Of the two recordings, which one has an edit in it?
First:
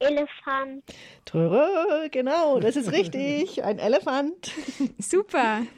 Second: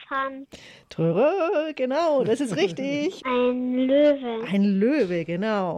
second; 1 cut; at 3.2 s

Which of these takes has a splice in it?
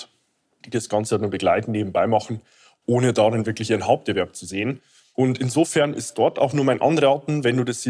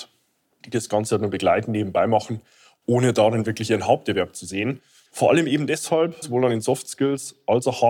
second; 2 cuts; at 5.1 s, 6.2 s

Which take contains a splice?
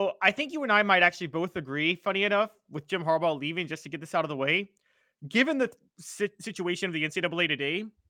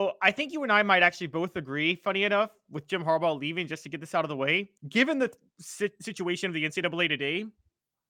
second; 1 cut; at 4.8 s

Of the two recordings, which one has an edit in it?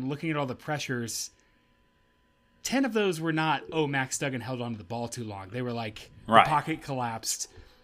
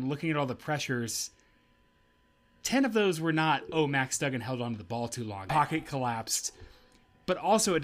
second; 1 cut; at 5.5 s

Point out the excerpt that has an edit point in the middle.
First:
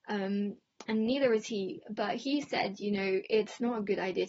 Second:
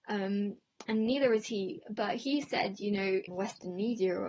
second; 1 cut; at 3.3 s

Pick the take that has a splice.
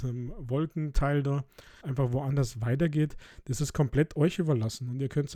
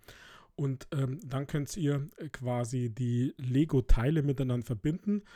first; 1 cut; at 1.8 s

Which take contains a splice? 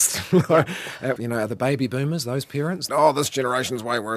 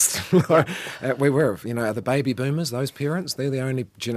first; 2 cuts; at 1.2 s, 2.9 s

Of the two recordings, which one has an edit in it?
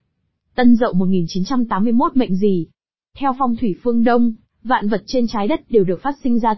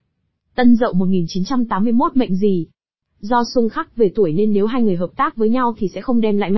second; 1 cut; at 3.0 s

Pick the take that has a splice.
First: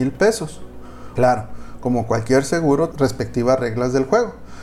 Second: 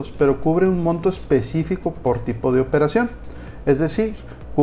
first; 2 cuts; at 1.2 s, 2.9 s

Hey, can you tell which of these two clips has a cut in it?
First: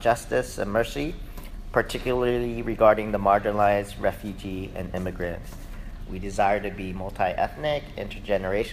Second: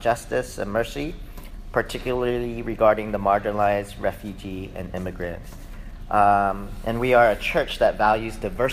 first; 1 cut; at 6.1 s

